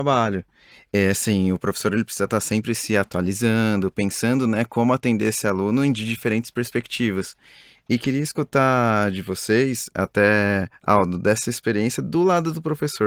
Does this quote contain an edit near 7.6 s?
no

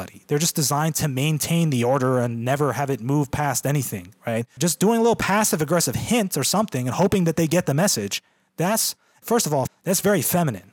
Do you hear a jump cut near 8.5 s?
no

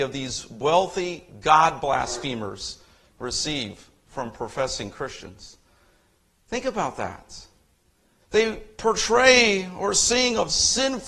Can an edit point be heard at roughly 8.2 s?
yes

